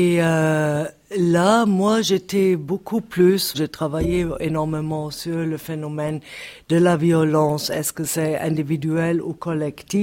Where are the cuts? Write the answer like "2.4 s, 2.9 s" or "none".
3.5 s